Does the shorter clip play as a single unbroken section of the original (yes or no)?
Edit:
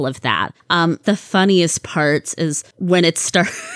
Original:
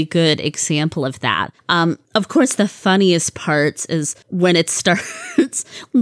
no